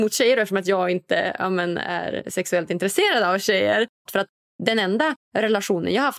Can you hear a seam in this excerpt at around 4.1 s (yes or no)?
yes